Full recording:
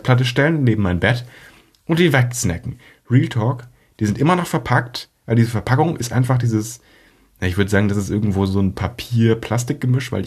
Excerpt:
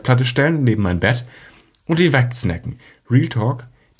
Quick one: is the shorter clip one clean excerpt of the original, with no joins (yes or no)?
yes